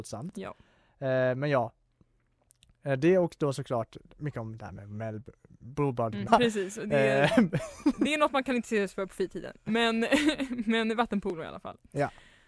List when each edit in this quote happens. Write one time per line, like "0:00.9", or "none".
0:06.3